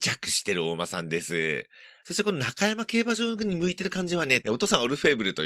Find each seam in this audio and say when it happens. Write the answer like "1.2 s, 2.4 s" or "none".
2.0 s, 4.4 s